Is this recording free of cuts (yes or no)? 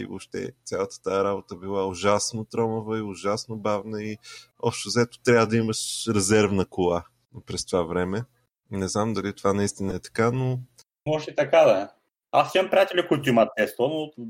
yes